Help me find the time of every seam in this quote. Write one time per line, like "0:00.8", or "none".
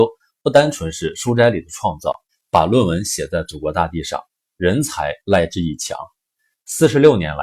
0:02.3